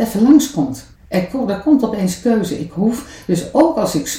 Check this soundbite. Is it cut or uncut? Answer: cut